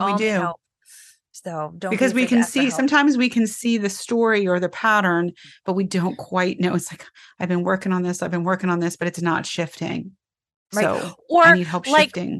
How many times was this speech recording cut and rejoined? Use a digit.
0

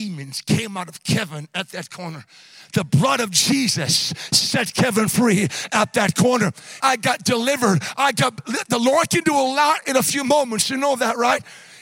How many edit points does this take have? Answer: 1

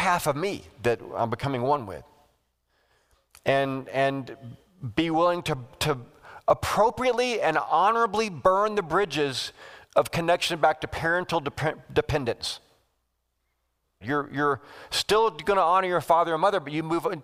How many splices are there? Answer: 1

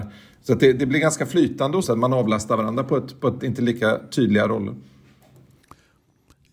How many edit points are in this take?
2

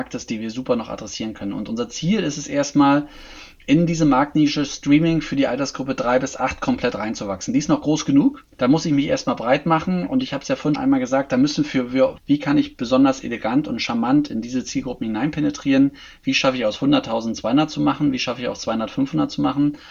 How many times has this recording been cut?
3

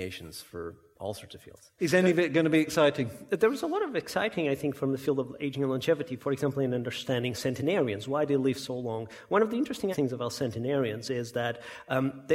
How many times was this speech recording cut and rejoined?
2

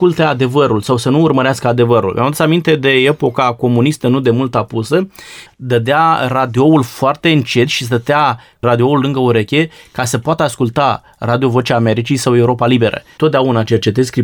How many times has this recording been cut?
2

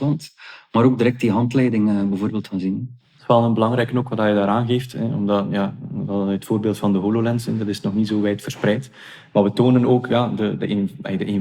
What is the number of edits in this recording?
0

